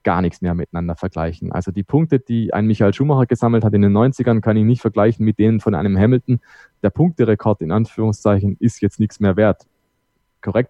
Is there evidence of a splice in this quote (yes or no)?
no